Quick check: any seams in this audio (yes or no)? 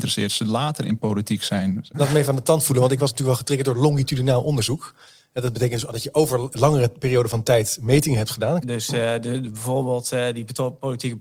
yes